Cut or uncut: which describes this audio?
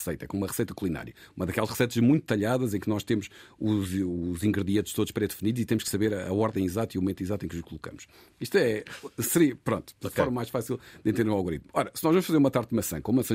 uncut